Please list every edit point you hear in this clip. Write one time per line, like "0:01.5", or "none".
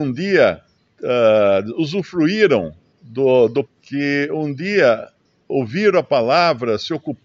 0:03.7